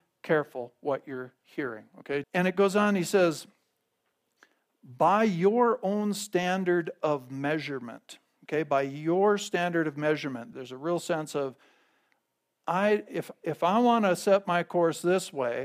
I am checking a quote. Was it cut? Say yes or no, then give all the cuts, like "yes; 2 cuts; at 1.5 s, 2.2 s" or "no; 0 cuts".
yes; 2 cuts; at 2.2 s, 10.5 s